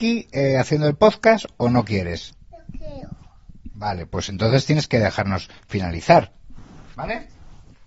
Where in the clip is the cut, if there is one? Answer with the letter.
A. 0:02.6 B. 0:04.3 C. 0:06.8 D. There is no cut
D